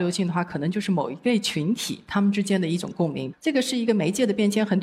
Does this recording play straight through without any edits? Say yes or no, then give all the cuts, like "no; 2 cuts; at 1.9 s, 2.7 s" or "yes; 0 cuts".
no; 1 cut; at 3.3 s